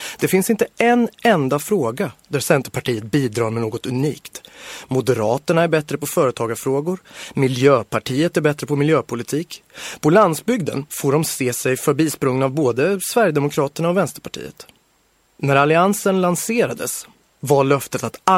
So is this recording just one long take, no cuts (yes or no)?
no